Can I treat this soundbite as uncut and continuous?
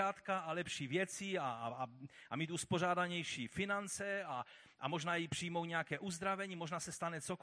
yes; 0 cuts

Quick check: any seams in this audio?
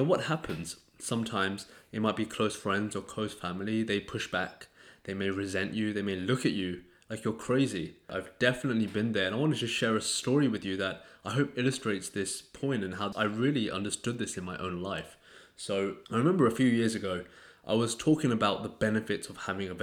no; 0 cuts

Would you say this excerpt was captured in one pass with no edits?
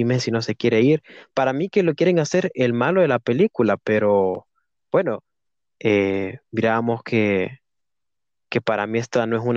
yes; 0 cuts

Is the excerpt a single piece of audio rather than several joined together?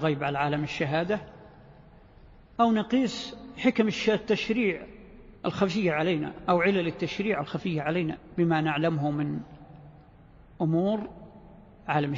no; 1 cut; at 5.4 s

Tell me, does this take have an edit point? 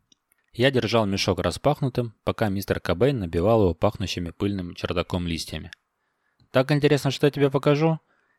yes; 1 cut; at 6.4 s

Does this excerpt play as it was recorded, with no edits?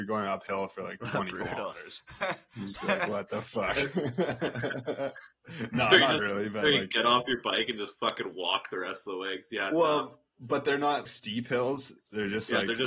no; 2 cuts; at 6.2 s, 11.1 s

